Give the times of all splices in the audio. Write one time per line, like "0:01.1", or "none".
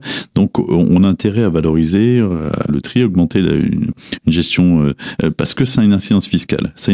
0:02.7
0:03.9
0:05.2